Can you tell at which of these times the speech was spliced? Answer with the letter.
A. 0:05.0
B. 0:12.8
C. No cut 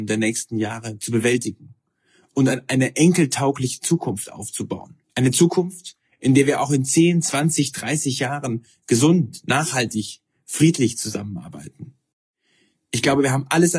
A